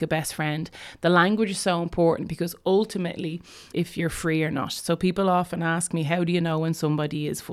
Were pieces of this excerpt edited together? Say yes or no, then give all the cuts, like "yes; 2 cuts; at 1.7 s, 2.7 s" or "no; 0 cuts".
yes; 1 cut; at 3.7 s